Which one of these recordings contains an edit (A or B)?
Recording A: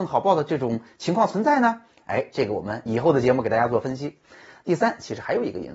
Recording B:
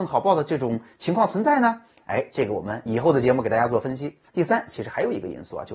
B